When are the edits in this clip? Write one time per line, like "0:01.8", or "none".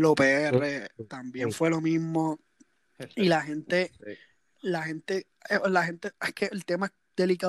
0:06.1